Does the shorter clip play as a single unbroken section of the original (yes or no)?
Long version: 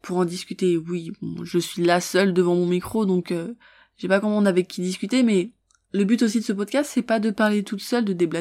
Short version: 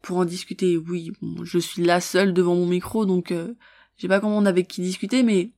yes